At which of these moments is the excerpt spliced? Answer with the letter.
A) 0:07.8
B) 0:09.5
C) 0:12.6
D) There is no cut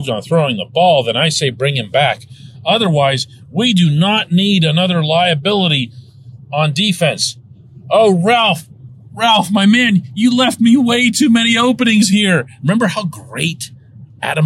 C